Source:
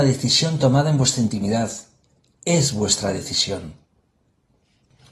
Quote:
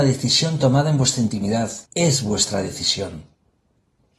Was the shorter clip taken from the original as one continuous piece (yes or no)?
no